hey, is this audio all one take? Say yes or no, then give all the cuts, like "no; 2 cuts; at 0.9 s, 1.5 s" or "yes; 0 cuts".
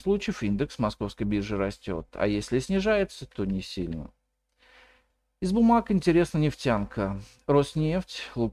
yes; 0 cuts